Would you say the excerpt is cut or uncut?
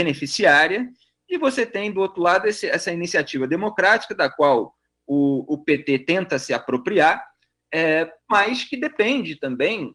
uncut